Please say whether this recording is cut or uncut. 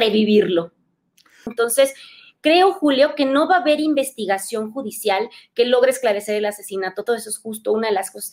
cut